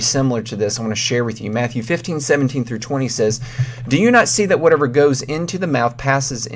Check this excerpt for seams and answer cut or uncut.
uncut